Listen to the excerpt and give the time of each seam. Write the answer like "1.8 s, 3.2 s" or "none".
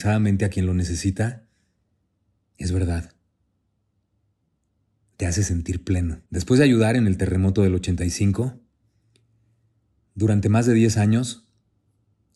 6.3 s